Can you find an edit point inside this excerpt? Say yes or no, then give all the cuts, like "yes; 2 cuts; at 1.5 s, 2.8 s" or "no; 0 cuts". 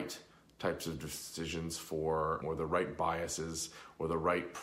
yes; 1 cut; at 2.4 s